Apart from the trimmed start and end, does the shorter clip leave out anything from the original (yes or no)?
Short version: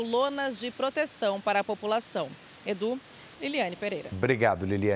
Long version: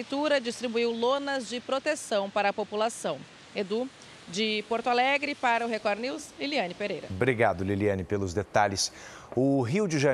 yes